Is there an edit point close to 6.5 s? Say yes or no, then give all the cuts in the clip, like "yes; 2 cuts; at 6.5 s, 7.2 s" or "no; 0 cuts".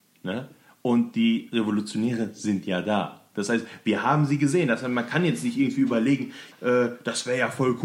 yes; 1 cut; at 6.5 s